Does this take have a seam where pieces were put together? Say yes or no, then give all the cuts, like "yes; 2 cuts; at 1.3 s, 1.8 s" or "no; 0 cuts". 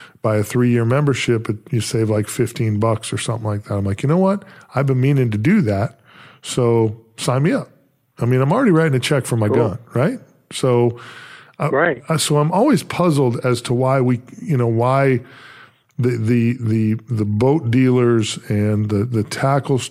no; 0 cuts